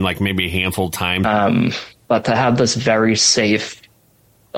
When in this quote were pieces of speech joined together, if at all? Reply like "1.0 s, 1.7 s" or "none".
1.2 s